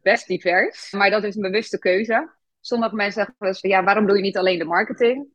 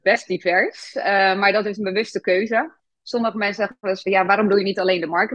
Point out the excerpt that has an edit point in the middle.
first; 1 cut; at 0.9 s

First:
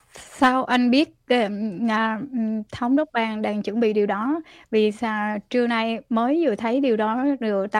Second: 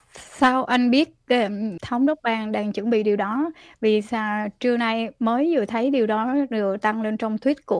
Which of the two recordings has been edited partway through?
second; 1 cut; at 1.8 s

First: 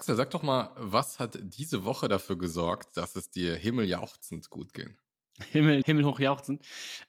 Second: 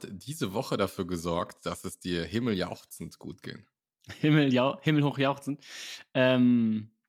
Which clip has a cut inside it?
first; 1 cut; at 5.8 s

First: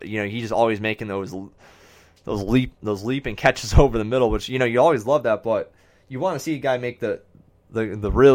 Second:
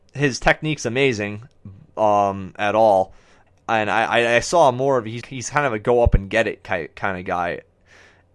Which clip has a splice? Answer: second; 2 cuts; at 3.5 s, 5.2 s

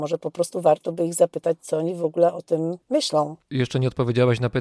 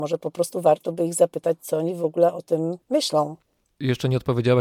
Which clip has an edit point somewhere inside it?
first; 1 cut; at 3.4 s

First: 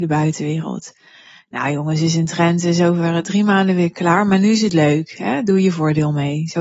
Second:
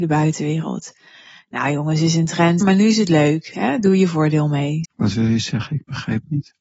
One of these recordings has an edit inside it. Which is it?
second; 2 cuts; at 2.6 s, 4.8 s

